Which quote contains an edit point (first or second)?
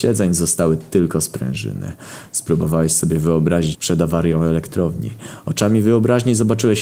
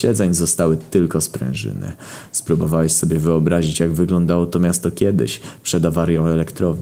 first